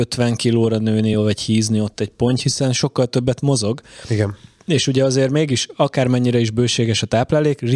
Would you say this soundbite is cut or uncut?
uncut